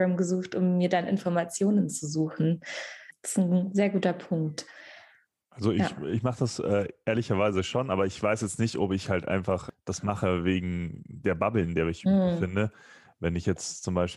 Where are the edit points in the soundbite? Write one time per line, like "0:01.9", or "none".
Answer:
none